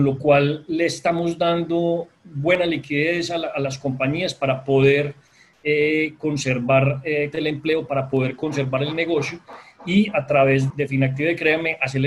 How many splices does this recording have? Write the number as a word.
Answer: two